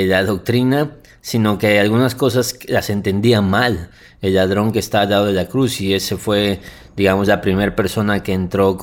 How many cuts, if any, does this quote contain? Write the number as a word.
zero